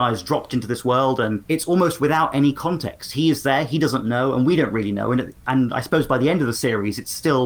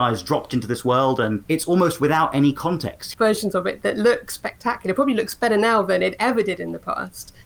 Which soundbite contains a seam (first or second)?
second